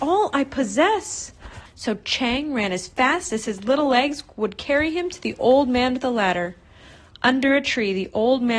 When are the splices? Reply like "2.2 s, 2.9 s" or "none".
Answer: 1.7 s

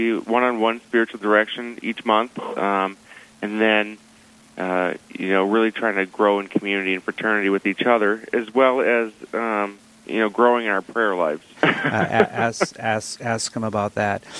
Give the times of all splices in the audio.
11.5 s

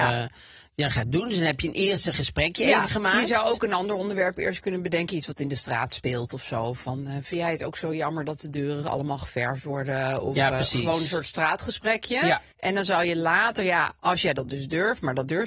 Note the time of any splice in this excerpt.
12.5 s

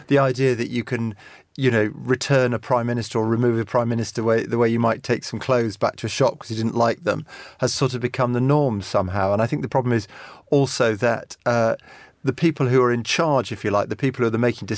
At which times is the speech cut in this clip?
none

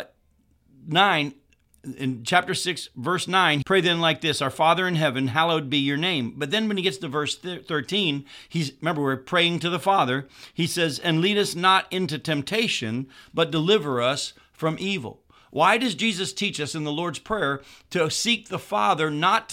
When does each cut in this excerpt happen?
3.6 s

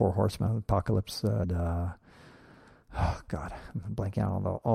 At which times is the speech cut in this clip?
1.4 s

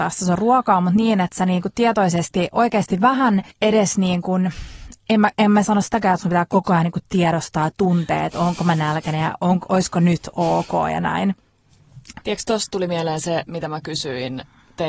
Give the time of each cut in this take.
3.5 s, 12.2 s

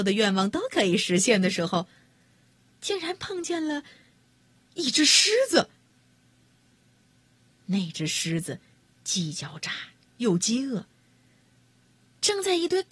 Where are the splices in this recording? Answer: none

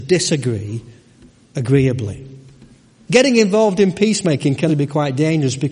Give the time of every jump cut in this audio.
3.1 s, 4.7 s

